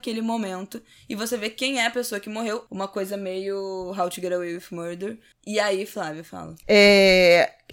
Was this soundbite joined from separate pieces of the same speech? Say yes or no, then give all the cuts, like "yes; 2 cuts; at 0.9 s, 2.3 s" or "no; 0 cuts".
yes; 3 cuts; at 2.7 s, 5.3 s, 6.6 s